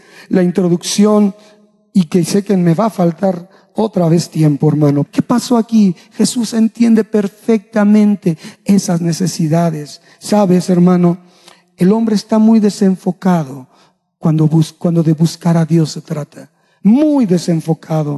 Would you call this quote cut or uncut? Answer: cut